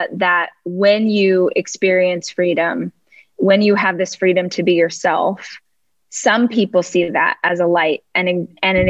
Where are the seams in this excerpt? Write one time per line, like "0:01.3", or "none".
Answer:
none